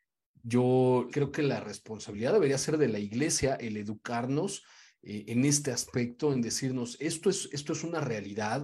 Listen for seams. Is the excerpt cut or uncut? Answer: cut